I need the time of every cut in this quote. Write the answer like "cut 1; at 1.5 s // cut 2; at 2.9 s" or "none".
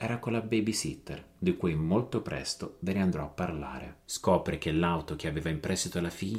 cut 1; at 4.1 s

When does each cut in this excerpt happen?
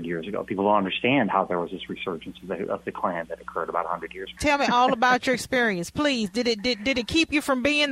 cut 1; at 4.4 s

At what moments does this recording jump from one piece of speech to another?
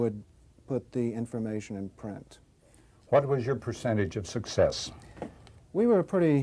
none

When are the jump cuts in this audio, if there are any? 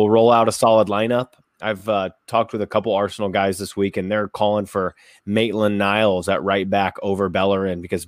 none

